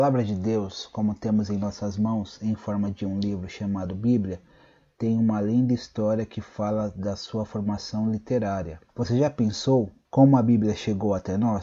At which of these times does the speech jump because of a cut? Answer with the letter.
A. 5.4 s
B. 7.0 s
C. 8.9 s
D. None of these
C